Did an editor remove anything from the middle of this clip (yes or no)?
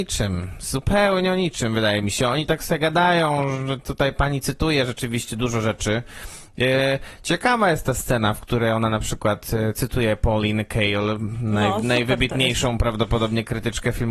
no